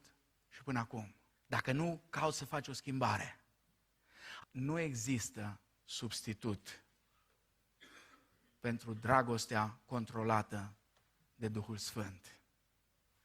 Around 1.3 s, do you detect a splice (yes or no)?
yes